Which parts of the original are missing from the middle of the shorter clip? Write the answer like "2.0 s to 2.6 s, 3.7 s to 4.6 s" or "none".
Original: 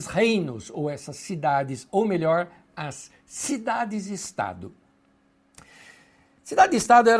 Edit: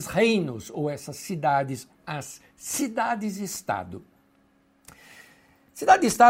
1.9 s to 2.6 s